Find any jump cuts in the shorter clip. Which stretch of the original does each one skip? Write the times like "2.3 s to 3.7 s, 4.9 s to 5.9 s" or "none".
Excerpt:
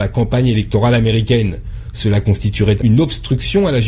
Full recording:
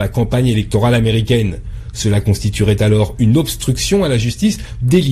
2.8 s to 3.2 s